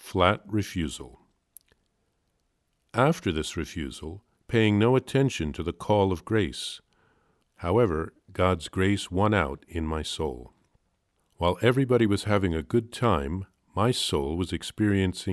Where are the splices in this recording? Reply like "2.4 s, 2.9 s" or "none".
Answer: 4.3 s, 7.4 s, 11.2 s